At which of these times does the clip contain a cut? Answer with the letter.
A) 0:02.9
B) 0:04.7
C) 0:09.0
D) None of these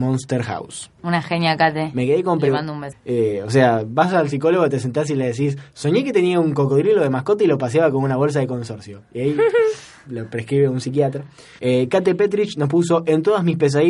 A